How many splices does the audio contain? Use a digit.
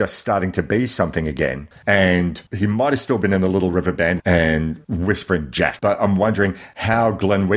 2